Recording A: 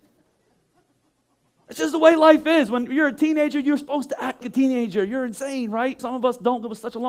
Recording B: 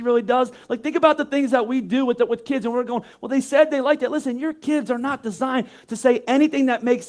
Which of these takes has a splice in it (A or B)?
A